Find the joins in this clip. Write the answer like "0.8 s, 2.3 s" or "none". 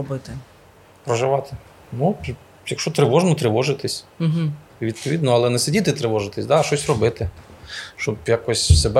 1.8 s